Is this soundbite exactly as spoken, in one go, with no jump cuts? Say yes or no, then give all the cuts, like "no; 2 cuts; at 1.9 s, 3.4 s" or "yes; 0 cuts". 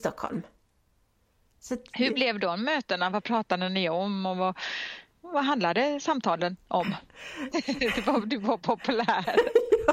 no; 2 cuts; at 5.1 s, 7.5 s